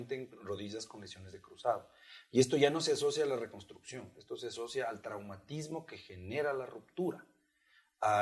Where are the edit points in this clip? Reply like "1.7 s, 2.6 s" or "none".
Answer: none